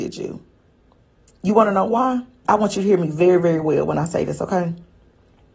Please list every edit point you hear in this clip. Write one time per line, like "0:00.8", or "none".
0:02.4